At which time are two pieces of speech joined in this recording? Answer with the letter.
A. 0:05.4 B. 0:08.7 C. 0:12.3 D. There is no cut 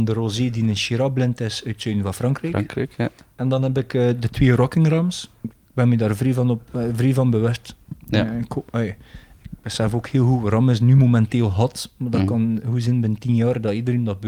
A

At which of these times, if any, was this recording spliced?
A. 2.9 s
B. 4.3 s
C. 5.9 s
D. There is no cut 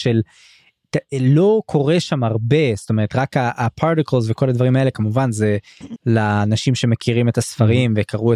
C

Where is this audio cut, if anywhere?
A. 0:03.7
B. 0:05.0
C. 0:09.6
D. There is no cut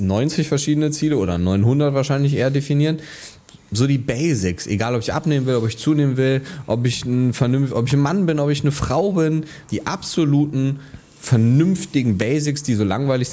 C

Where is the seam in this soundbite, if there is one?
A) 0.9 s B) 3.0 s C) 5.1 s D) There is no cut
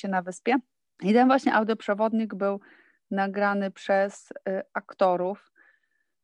D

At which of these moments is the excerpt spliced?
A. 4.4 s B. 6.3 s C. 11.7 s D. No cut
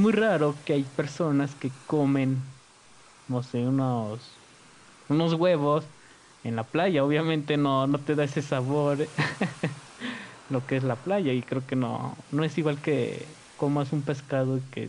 D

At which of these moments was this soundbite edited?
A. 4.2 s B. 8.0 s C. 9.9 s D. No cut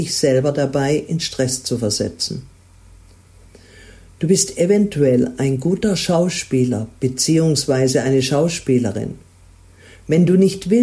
D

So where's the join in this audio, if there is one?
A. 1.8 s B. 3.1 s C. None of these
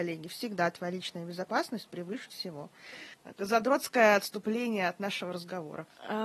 B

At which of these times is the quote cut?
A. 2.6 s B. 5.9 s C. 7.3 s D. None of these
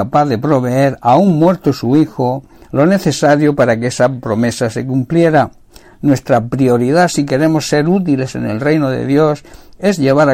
B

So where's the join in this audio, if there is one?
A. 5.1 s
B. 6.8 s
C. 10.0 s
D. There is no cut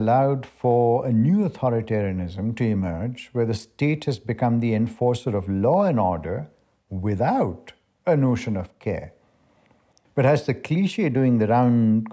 C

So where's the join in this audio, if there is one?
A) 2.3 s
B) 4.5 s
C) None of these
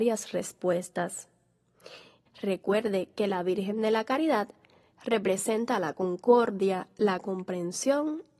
A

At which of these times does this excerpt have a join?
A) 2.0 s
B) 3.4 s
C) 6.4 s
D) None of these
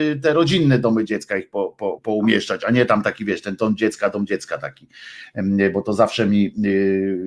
A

